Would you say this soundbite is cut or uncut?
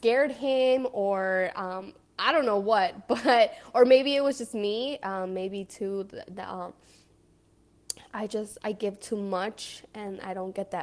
uncut